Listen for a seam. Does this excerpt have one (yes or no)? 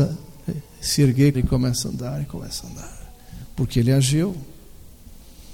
yes